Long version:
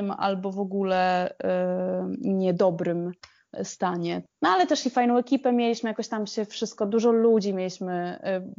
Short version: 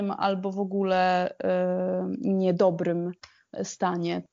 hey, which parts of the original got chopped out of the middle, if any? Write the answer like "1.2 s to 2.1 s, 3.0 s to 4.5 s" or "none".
none